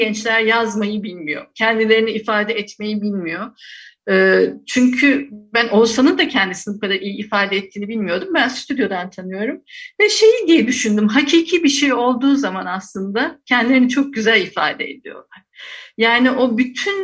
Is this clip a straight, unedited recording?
yes; 0 cuts

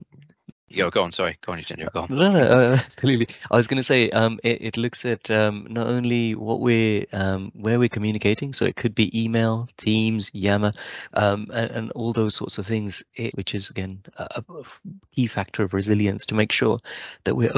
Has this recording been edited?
yes; 2 cuts; at 11.1 s, 13.3 s

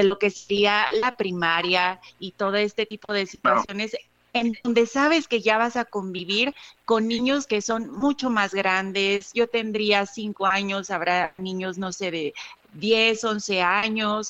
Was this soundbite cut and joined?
no; 0 cuts

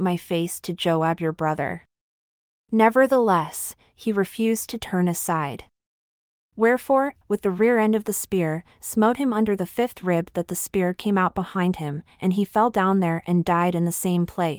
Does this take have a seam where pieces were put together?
yes; 1 cut; at 7.2 s

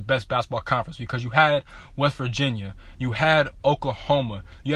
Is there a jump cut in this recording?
no; 0 cuts

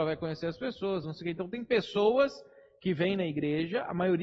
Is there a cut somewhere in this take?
yes; 1 cut; at 1.0 s

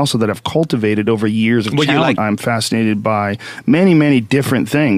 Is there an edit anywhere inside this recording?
yes; 1 cut; at 2.2 s

